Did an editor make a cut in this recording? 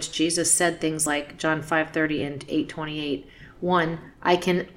no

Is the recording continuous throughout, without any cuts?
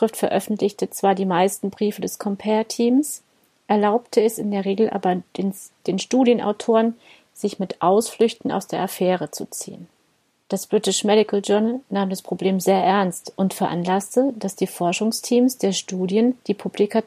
no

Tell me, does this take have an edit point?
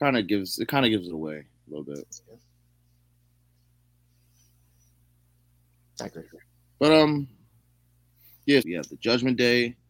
yes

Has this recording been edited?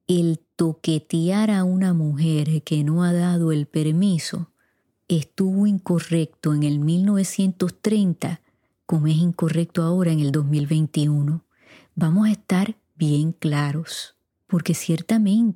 yes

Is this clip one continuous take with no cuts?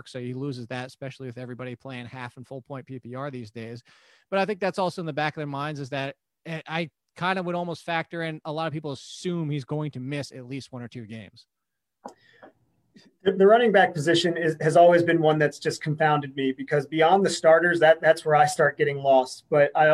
yes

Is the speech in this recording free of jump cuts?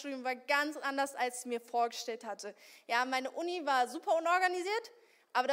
yes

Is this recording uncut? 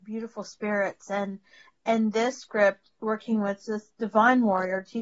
yes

